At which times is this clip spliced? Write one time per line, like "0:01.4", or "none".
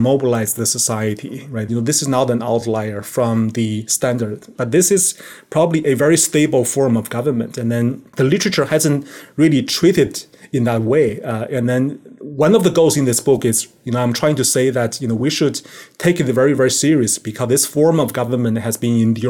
0:01.7
0:04.5